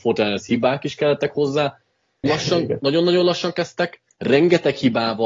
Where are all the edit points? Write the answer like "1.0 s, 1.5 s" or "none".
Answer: 2.2 s